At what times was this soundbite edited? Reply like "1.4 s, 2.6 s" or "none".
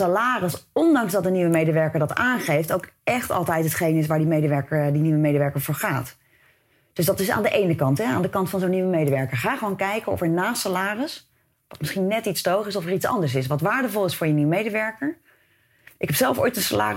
none

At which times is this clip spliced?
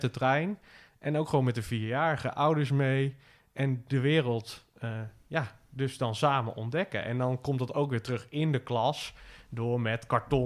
none

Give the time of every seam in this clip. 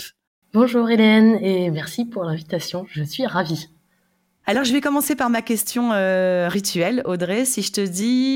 none

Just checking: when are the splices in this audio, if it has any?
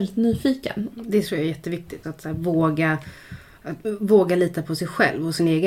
0.9 s, 2.0 s

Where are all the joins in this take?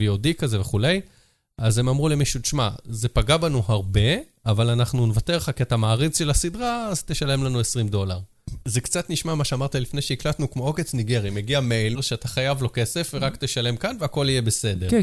8.6 s, 11.9 s

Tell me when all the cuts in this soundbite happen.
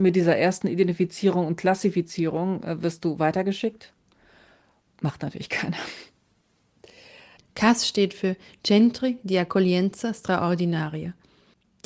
4.8 s, 7.4 s

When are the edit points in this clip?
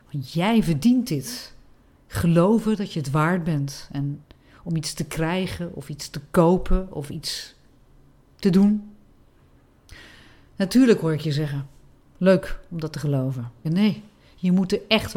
2.0 s, 13.6 s

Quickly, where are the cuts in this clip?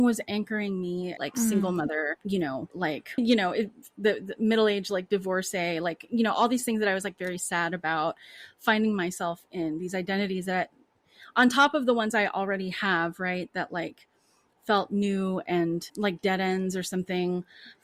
1.2 s

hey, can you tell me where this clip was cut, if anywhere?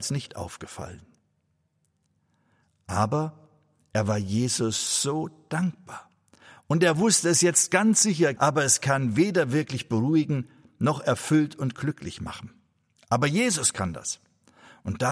8.4 s

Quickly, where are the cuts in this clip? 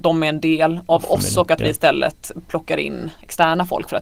none

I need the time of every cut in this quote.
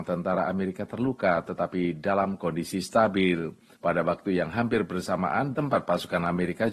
5.5 s

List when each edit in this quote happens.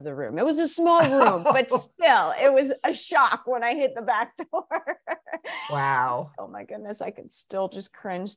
6.4 s

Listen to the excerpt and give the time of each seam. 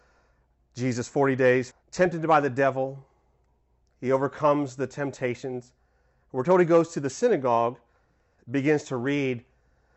1.7 s, 8.4 s

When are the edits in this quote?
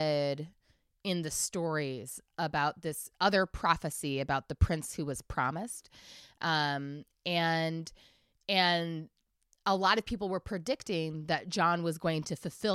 none

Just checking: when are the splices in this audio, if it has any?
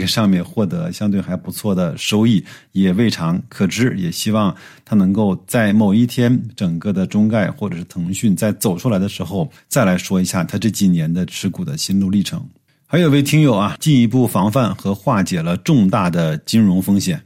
13.8 s

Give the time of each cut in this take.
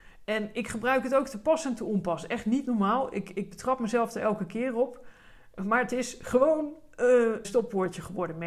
7.4 s

